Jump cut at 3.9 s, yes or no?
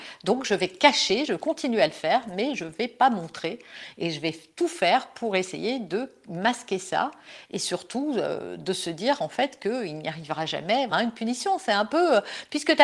no